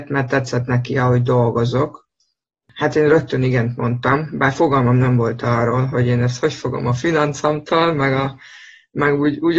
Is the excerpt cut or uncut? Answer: uncut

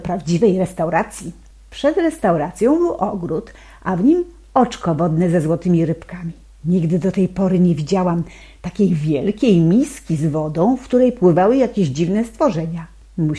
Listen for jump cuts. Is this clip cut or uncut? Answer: uncut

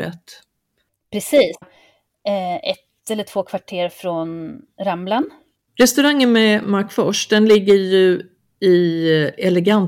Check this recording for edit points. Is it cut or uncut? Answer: cut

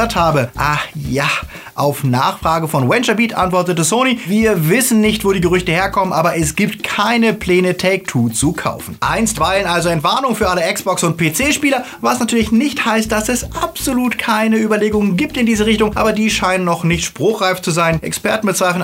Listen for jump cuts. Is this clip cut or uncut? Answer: uncut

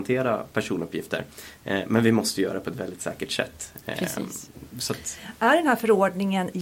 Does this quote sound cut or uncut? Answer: uncut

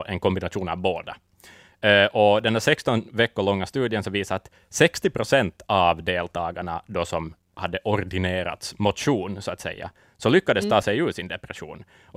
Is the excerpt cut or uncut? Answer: uncut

